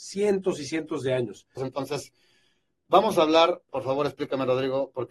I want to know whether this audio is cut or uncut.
cut